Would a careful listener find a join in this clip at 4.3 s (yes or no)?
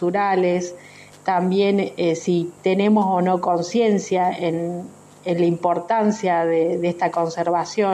no